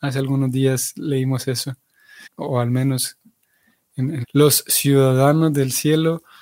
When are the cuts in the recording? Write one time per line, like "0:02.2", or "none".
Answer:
0:02.3
0:04.2